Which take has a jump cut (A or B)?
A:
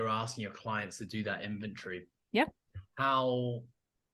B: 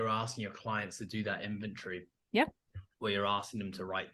A